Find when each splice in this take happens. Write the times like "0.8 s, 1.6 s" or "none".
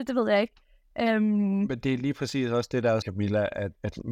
3.0 s